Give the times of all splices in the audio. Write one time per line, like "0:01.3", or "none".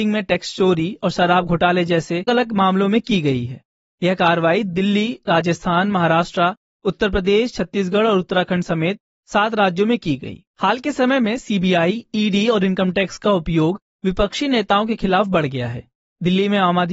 0:02.3
0:10.5